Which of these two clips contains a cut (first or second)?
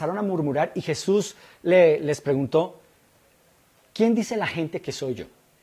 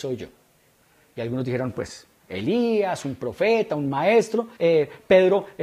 second